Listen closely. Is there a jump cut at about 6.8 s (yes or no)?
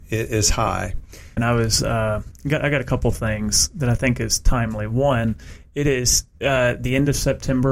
no